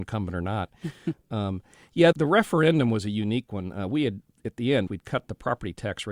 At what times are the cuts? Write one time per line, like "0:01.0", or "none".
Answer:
0:02.1
0:04.9